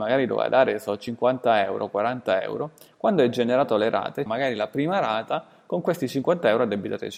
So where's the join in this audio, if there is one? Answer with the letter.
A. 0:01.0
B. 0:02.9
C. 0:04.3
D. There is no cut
C